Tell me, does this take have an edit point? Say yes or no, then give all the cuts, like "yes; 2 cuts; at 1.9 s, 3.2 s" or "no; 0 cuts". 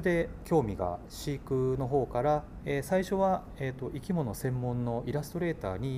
yes; 1 cut; at 2.6 s